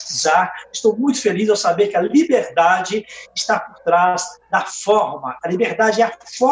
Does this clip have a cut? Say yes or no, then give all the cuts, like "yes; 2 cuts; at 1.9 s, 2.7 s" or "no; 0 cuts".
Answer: no; 0 cuts